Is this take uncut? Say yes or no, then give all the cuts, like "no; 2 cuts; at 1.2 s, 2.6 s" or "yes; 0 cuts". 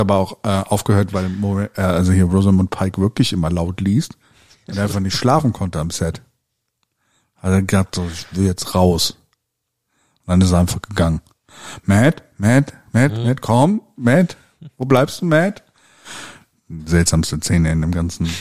yes; 0 cuts